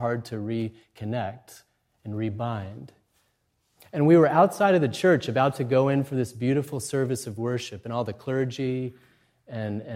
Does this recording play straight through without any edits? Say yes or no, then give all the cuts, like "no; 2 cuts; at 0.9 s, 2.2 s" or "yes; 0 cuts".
yes; 0 cuts